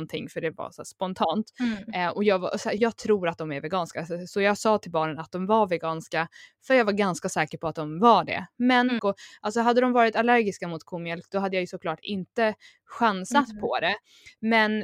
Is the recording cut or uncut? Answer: cut